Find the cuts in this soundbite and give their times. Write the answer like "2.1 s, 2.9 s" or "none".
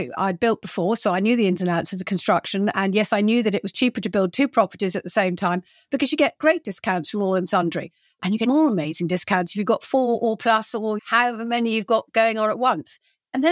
8.5 s, 11.0 s